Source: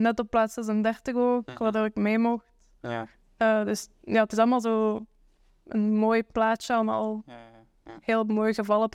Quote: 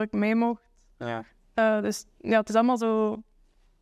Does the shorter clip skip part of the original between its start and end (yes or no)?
no